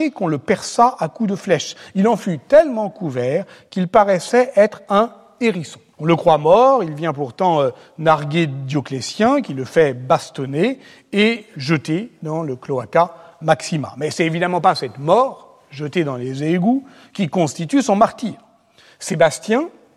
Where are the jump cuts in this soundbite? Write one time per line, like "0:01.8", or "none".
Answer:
0:05.9

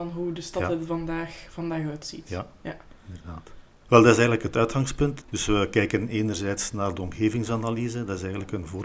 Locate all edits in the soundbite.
0:03.8
0:05.2

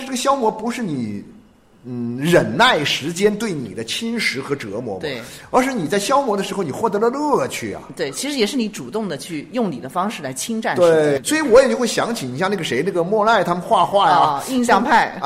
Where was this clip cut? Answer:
none

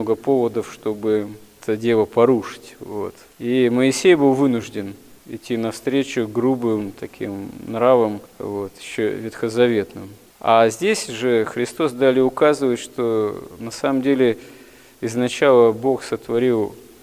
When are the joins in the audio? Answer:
none

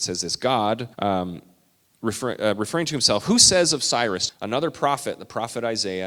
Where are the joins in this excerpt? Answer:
0:00.9
0:04.3

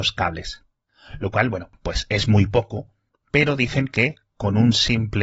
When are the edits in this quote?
none

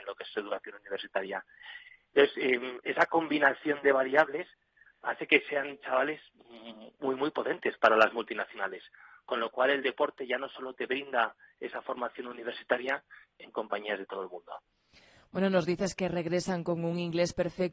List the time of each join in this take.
0:13.3

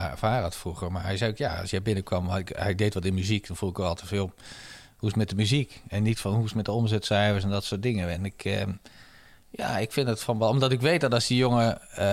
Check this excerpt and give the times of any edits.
none

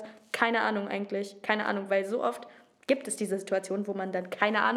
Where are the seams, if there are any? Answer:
none

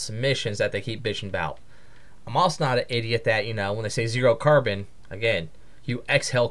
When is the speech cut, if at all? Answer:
none

